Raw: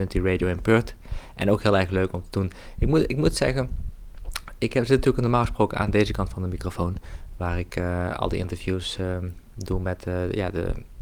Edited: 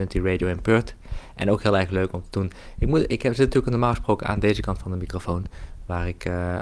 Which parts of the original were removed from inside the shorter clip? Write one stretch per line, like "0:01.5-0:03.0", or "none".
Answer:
0:03.1-0:04.6

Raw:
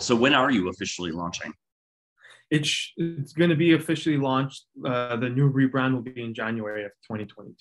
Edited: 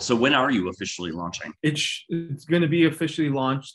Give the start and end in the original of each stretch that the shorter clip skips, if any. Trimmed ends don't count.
0:01.6-0:02.5

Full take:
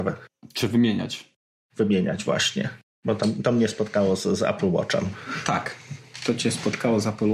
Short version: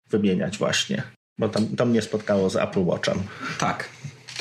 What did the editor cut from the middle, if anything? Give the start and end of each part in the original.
0:04.2-0:04.4

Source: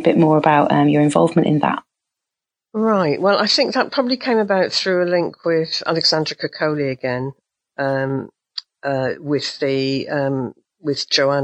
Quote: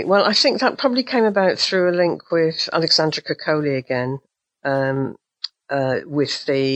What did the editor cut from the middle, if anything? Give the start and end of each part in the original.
none

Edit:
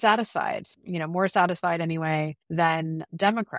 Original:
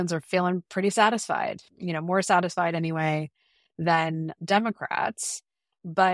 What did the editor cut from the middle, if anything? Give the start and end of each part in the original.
0:03.4-0:03.7

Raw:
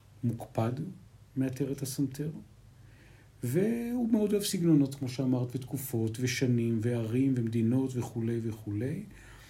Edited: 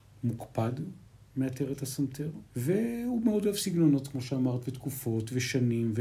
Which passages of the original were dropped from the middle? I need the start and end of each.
0:02.5-0:03.4

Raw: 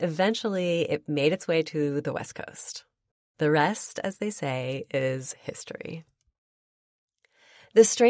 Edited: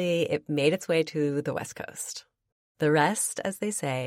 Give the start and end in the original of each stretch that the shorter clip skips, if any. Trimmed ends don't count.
none

